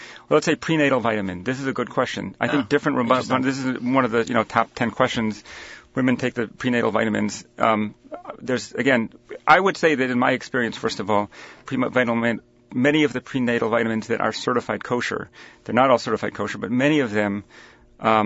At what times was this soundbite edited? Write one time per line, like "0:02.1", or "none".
0:11.7